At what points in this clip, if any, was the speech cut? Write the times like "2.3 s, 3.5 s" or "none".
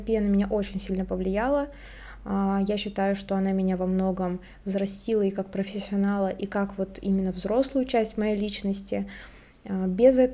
none